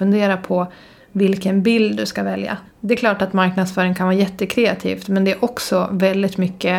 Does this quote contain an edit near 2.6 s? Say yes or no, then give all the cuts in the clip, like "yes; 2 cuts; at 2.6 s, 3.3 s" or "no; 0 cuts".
yes; 1 cut; at 2.6 s